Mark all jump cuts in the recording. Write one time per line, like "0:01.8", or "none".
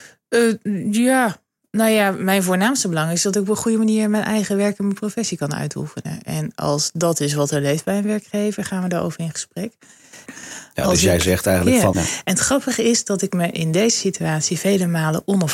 0:10.3
0:11.9